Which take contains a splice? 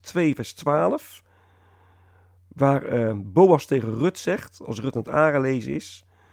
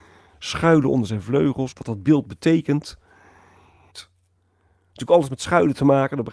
second; 2 cuts; at 1.7 s, 3.9 s

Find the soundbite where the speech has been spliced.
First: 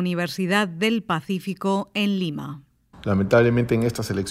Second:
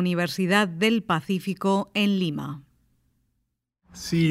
first; 1 cut; at 2.9 s

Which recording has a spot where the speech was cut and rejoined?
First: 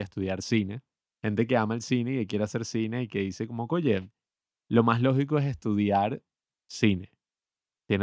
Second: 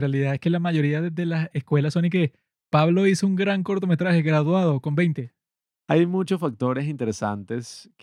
first; 1 cut; at 1.1 s

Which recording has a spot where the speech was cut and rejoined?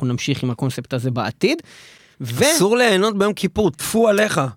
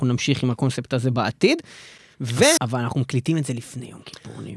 second; 1 cut; at 2.6 s

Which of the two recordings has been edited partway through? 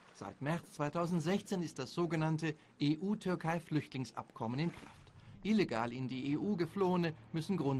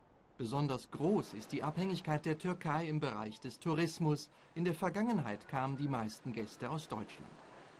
first; 1 cut; at 5.3 s

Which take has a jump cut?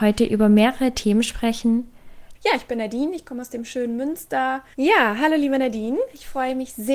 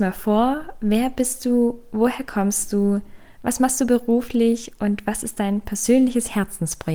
first; 2 cuts; at 2.3 s, 4.7 s

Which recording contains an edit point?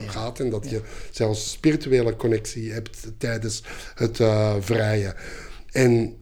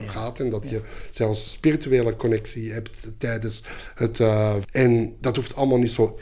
second; 1 cut; at 4.6 s

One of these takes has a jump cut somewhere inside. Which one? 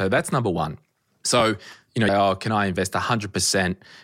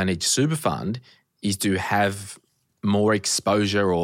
first; 1 cut; at 2.1 s

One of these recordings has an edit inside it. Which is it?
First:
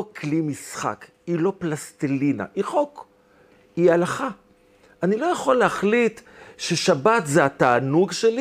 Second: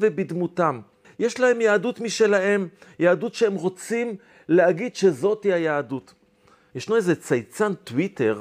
second; 2 cuts; at 1.0 s, 6.7 s

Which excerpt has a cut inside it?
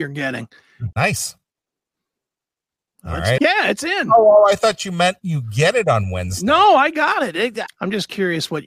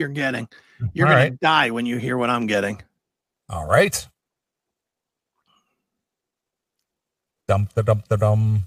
first; 3 cuts; at 0.9 s, 3.4 s, 7.7 s

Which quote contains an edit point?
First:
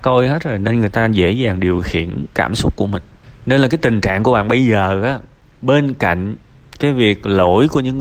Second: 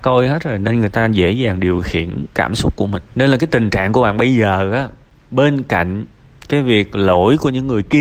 second; 1 cut; at 3.1 s

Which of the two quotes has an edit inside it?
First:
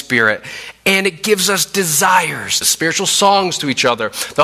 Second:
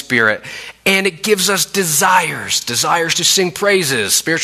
first; 1 cut; at 2.6 s

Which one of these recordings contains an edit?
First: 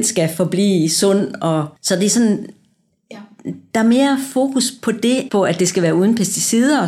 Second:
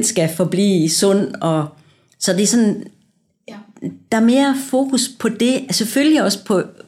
first; 2 cuts; at 1.8 s, 5.3 s

